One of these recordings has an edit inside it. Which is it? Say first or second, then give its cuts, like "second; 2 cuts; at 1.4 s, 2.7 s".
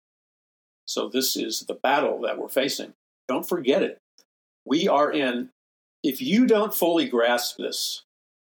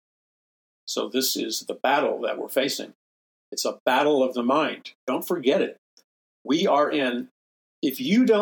first; 1 cut; at 3.2 s